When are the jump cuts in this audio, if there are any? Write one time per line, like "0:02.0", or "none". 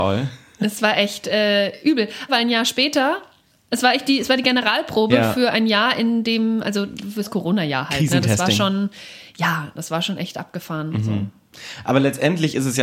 0:02.3